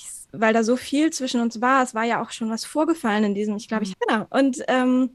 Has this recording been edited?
yes; 1 cut; at 3.9 s

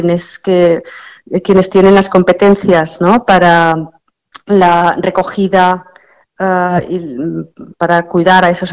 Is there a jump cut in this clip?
no; 0 cuts

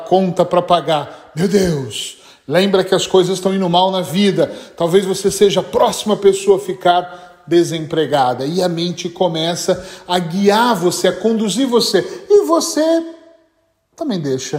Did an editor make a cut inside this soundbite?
no; 0 cuts

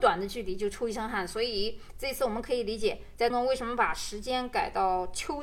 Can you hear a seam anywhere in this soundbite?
yes; 1 cut; at 3.3 s

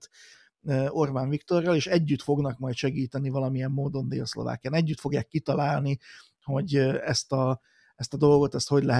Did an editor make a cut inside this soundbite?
no; 0 cuts

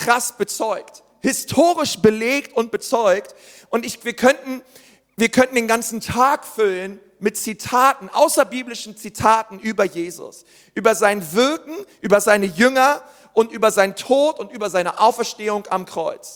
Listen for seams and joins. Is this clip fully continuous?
yes; 0 cuts

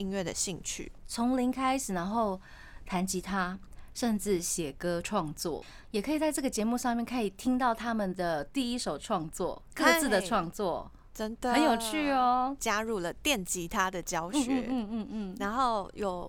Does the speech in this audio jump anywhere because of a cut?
yes; 1 cut; at 12.6 s

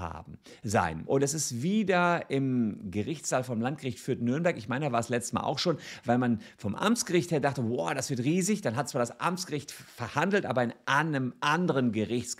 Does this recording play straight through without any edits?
no; 1 cut; at 1.0 s

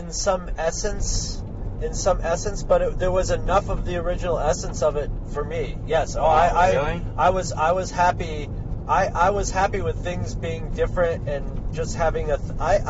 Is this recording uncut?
yes; 0 cuts

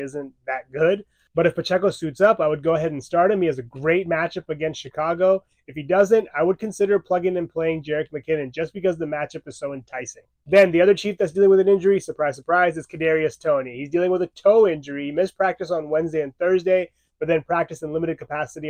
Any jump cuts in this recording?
no; 0 cuts

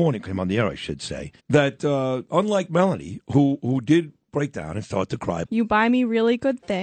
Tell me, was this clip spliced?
yes; 2 cuts; at 1.4 s, 5.4 s

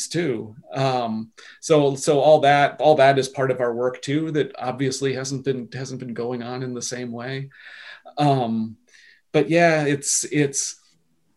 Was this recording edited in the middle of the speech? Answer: no; 0 cuts

